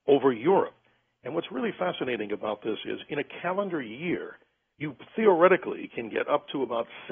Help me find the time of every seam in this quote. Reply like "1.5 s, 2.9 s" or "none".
none